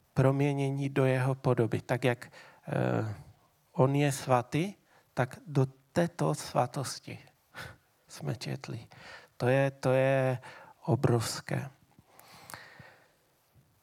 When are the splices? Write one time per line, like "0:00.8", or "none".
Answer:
none